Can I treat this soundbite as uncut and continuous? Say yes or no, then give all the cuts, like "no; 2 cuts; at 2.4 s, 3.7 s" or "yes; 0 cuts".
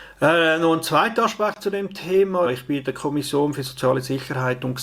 no; 1 cut; at 2.4 s